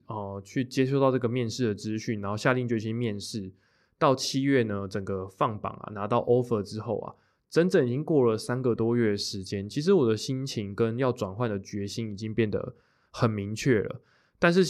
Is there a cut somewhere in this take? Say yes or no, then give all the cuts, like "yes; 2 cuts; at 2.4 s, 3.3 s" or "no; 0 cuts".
no; 0 cuts